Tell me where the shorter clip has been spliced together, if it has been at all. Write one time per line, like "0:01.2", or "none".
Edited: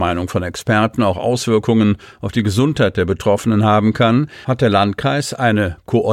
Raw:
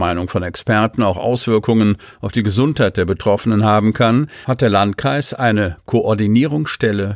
none